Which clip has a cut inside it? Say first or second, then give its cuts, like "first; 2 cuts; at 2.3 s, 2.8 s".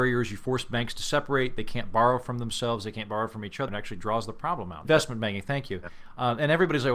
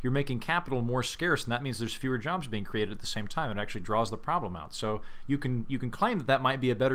first; 2 cuts; at 3.7 s, 4.8 s